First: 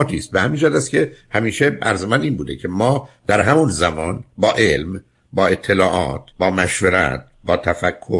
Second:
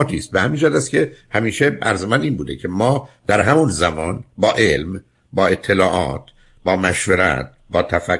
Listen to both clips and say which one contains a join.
first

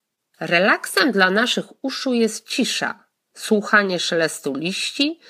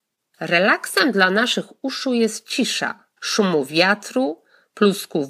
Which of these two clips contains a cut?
second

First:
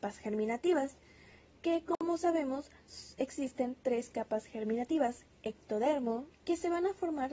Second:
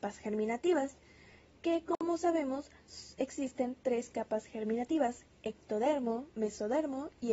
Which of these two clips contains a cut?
first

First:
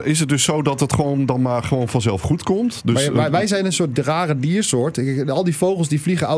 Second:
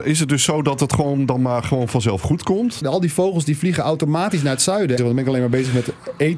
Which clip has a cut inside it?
second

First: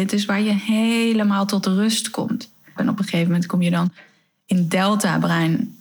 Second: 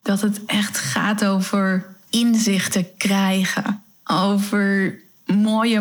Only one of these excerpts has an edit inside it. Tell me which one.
first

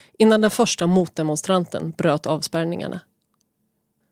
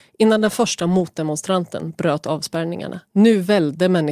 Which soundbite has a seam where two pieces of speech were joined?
second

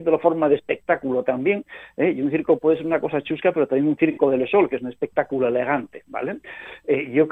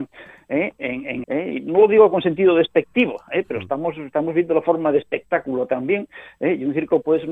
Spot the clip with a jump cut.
second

